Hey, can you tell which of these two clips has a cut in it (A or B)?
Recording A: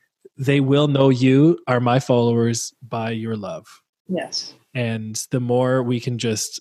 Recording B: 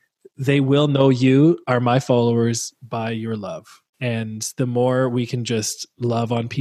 B